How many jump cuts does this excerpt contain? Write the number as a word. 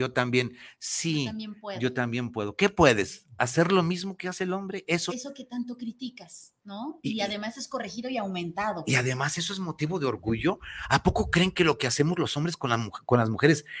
one